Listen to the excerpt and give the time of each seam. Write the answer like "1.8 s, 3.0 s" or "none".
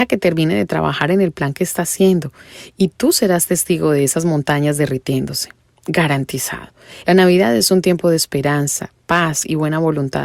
7.0 s